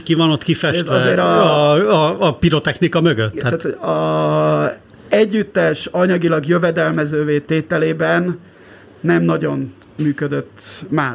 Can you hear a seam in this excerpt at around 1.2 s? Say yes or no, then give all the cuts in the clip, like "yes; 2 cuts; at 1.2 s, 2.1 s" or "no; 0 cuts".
no; 0 cuts